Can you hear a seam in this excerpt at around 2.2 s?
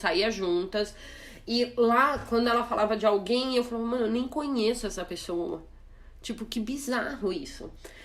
no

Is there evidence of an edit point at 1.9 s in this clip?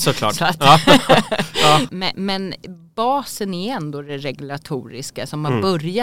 yes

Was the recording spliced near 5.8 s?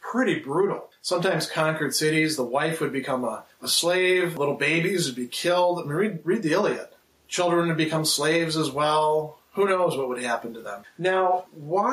no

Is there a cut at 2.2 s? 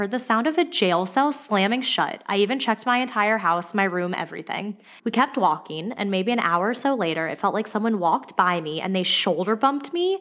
no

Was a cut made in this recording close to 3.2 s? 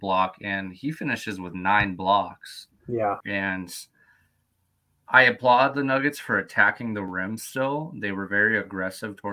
yes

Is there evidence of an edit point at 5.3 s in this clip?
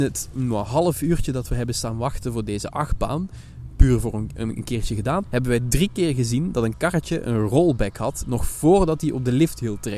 yes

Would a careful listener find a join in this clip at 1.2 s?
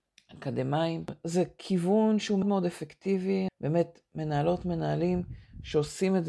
no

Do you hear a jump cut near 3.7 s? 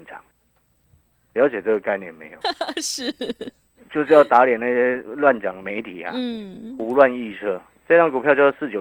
no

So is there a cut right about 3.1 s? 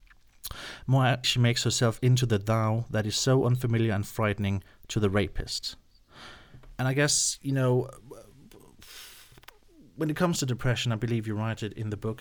no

